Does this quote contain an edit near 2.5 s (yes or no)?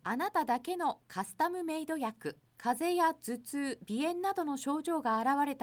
yes